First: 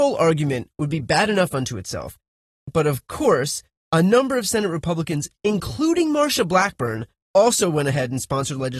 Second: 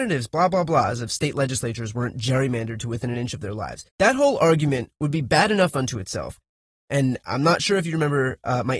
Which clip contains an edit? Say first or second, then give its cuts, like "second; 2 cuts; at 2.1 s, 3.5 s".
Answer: second; 2 cuts; at 3.9 s, 6.7 s